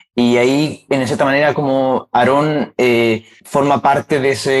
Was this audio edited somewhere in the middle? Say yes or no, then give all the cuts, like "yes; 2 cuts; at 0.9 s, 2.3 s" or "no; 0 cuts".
no; 0 cuts